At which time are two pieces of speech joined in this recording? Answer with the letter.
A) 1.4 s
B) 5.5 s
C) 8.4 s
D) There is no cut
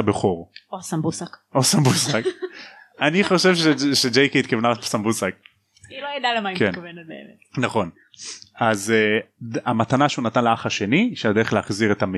D